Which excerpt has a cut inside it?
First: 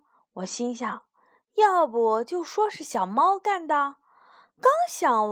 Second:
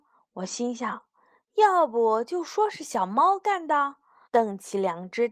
second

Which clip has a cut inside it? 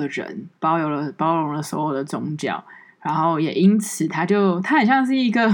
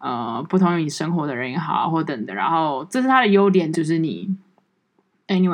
second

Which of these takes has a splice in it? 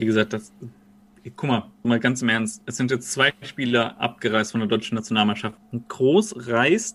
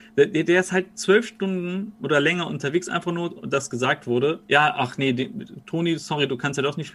first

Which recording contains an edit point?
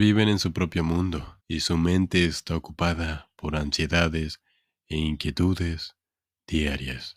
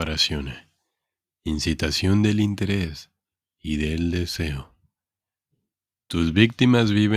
first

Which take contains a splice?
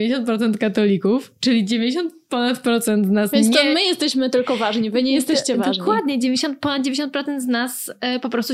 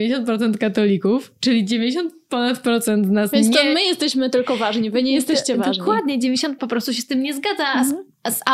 second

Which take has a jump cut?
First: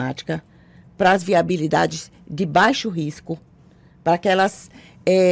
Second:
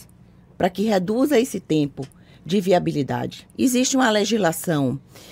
second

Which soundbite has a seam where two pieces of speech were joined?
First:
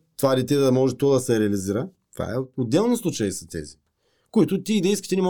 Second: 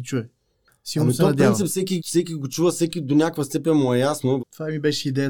second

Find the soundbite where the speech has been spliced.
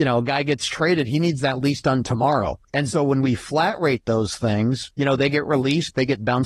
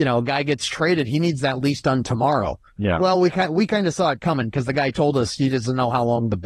first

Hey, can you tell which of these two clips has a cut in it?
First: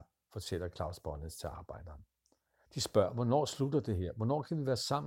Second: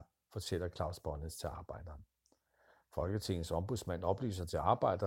first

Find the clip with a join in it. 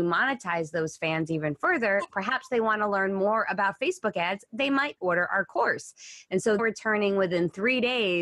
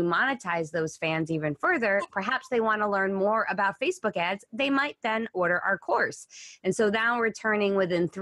first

